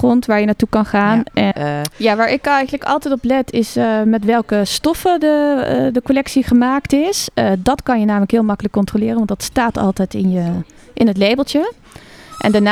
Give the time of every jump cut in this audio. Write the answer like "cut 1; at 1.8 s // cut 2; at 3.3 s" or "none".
cut 1; at 1.5 s